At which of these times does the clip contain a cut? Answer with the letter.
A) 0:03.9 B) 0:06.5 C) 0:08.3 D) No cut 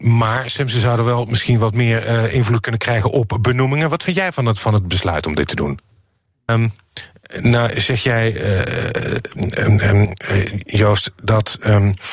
B